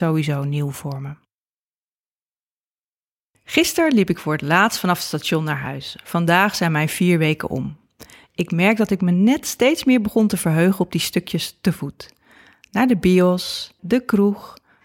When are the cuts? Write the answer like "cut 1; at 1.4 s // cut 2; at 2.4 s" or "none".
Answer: cut 1; at 13.8 s